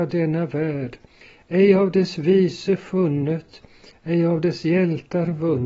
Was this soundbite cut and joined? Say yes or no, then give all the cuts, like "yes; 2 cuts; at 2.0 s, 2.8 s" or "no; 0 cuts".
no; 0 cuts